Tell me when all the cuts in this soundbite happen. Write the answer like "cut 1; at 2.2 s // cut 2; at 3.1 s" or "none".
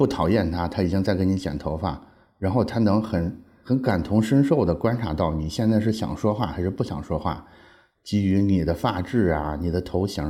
cut 1; at 7.9 s